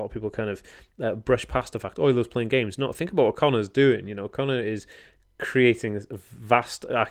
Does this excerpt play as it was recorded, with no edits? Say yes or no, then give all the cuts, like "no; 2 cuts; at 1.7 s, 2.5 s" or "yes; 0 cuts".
yes; 0 cuts